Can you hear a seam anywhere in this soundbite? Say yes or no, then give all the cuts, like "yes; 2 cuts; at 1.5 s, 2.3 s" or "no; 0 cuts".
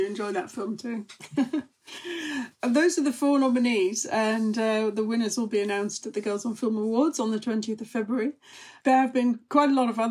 no; 0 cuts